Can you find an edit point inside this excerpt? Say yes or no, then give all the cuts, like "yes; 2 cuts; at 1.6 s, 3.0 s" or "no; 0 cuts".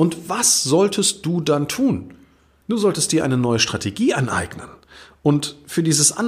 yes; 1 cut; at 2.6 s